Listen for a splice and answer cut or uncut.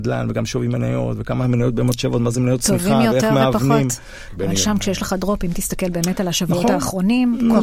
cut